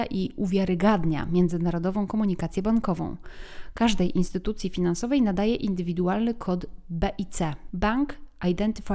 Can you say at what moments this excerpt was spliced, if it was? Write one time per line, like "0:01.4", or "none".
0:07.7